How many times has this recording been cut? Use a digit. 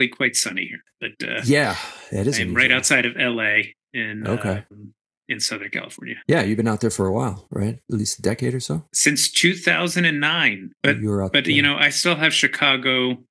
1